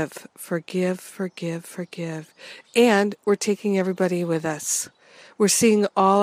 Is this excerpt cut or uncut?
cut